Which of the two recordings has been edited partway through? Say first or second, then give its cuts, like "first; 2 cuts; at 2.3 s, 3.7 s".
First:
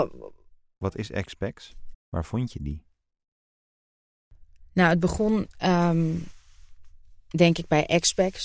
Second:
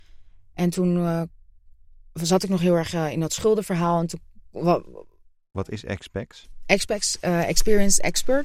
first; 1 cut; at 1.9 s